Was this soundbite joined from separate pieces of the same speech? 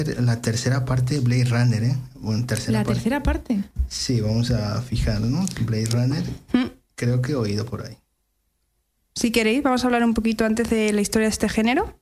no; 0 cuts

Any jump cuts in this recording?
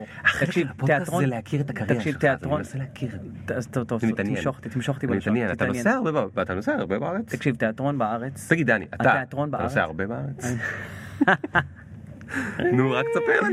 no; 0 cuts

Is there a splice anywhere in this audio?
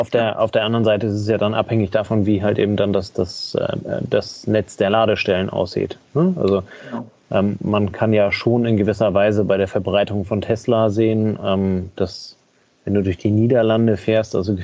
no; 0 cuts

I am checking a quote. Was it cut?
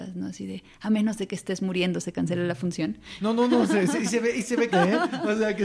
yes; 2 cuts; at 3.2 s, 4.7 s

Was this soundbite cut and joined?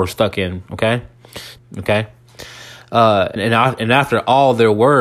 yes; 2 cuts; at 1.6 s, 3.4 s

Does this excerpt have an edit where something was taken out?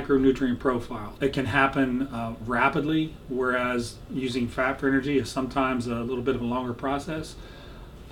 yes; 1 cut; at 1.2 s

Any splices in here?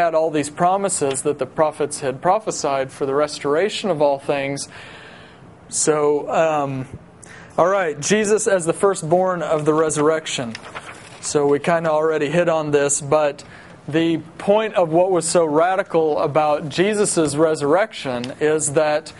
yes; 1 cut; at 5.7 s

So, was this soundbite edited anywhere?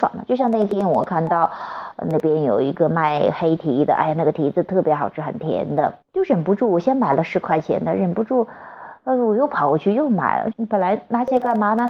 yes; 2 cuts; at 6.0 s, 10.5 s

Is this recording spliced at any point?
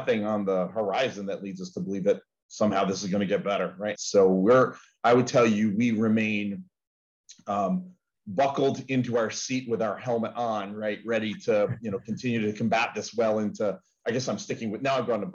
yes; 1 cut; at 3.9 s

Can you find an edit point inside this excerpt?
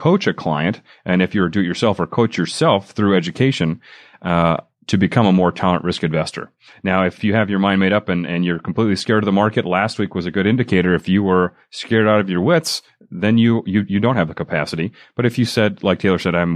no; 0 cuts

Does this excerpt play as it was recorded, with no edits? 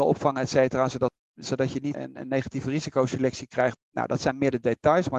no; 2 cuts; at 1.9 s, 3.7 s

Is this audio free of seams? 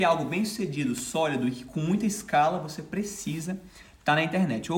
yes; 0 cuts

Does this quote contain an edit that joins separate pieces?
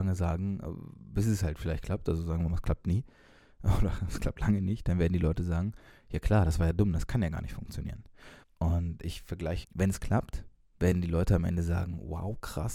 yes; 2 cuts; at 8.4 s, 9.6 s

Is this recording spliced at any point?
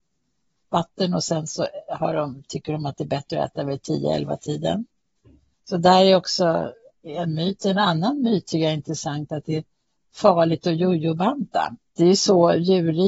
no; 0 cuts

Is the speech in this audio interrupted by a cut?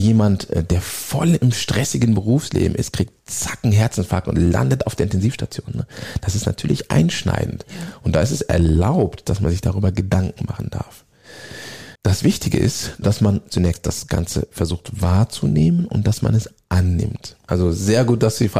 yes; 3 cuts; at 12.0 s, 13.0 s, 17.5 s

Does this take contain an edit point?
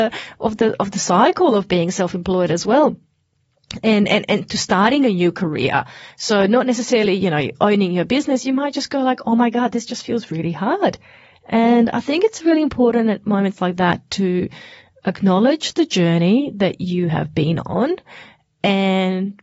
no; 0 cuts

